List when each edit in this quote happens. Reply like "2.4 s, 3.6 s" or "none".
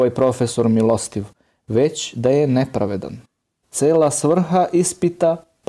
3.6 s